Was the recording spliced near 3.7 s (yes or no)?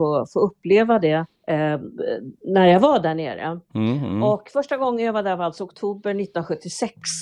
no